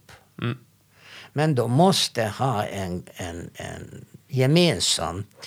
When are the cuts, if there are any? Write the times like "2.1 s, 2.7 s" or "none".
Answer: none